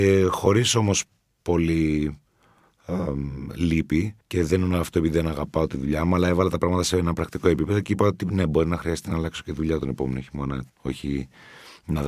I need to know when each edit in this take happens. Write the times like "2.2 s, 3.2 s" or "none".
4.2 s, 10.7 s